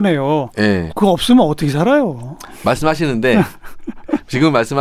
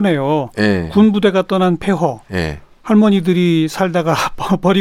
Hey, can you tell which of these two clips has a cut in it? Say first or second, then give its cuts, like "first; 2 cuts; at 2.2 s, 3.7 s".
first; 1 cut; at 0.9 s